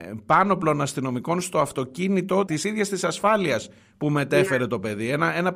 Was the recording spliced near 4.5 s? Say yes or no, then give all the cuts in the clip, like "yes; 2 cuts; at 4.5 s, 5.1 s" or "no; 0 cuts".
no; 1 cut; at 2.5 s